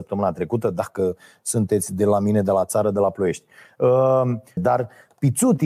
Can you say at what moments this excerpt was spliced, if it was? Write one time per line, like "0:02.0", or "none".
0:04.6